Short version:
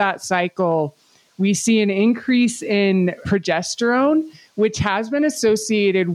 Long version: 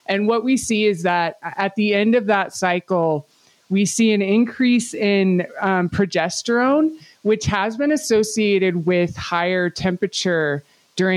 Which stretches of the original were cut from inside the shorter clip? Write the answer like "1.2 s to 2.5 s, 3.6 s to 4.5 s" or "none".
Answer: 5.5 s to 5.9 s